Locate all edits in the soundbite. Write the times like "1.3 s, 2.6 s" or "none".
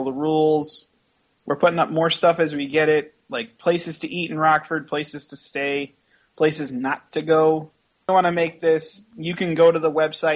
8.1 s